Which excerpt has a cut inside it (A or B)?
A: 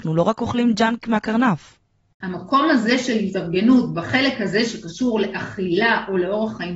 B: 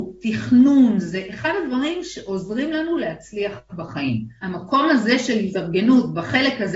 A